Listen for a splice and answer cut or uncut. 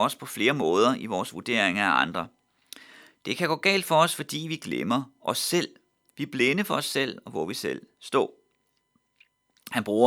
uncut